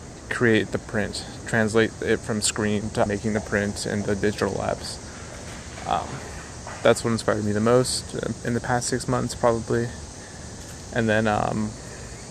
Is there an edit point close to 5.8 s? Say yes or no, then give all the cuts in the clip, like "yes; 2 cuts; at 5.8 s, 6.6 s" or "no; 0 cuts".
no; 1 cut; at 3.1 s